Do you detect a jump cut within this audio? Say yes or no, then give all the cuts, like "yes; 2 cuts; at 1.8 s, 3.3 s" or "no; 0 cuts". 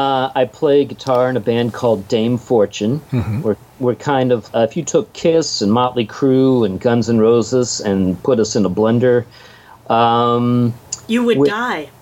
yes; 1 cut; at 4.5 s